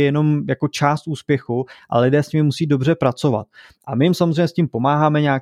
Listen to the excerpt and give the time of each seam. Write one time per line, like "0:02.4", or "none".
none